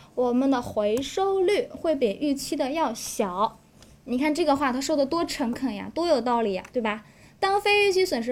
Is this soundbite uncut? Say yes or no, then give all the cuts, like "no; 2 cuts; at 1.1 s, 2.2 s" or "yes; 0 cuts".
yes; 0 cuts